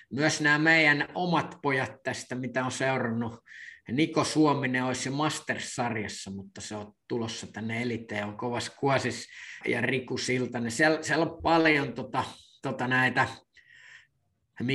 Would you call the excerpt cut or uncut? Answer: cut